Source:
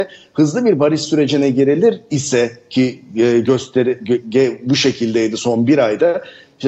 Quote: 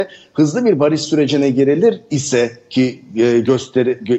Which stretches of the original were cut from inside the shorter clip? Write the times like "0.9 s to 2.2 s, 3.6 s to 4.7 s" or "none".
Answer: none